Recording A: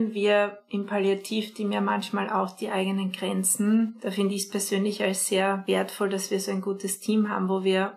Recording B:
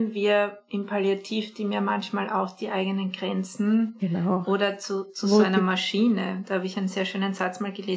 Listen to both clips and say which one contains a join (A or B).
B